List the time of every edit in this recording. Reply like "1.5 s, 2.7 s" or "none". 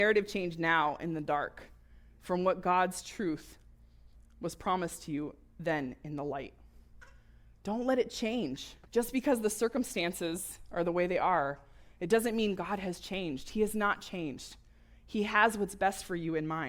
8.8 s

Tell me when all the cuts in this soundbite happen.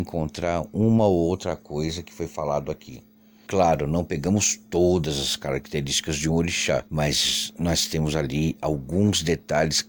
3.5 s, 6.9 s

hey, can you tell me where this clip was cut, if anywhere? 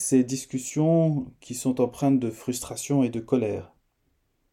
none

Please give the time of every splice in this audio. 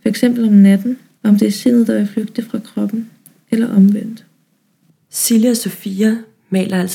1.2 s

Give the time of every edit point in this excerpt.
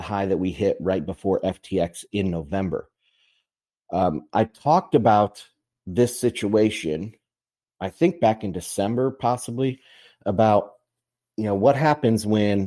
none

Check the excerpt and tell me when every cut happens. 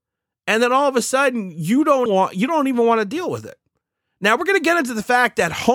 2.1 s

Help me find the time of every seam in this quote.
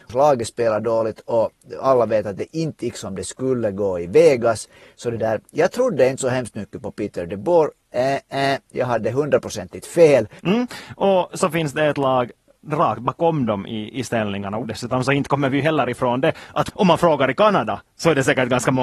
10.4 s, 14.6 s

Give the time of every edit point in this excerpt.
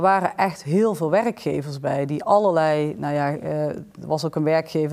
none

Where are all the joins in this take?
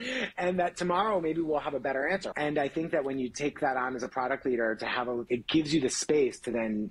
2.3 s, 5.3 s

